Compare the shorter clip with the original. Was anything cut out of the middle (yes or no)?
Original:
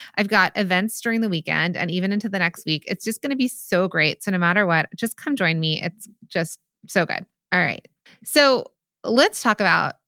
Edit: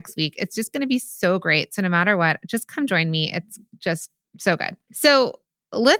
yes